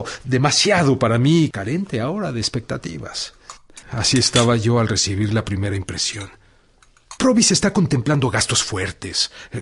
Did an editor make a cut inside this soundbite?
yes; 3 cuts; at 1.5 s, 3.8 s, 7.2 s

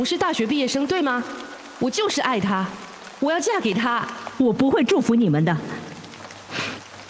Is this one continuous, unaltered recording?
yes; 0 cuts

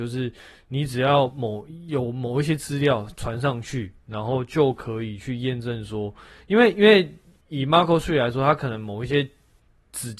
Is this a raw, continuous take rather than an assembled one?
yes; 0 cuts

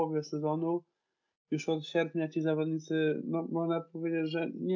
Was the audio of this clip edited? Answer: no; 0 cuts

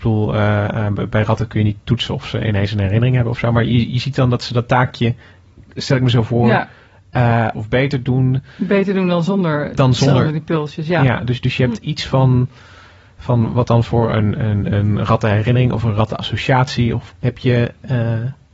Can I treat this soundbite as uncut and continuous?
no; 2 cuts; at 7.5 s, 17.1 s

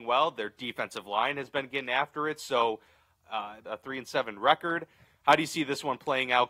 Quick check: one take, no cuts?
no; 1 cut; at 3.7 s

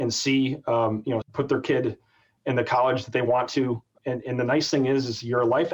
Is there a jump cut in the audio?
yes; 1 cut; at 1.2 s

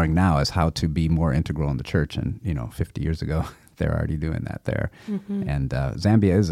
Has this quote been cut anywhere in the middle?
no; 0 cuts

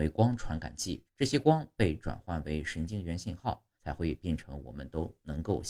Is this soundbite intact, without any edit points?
no; 2 cuts; at 1.1 s, 3.8 s

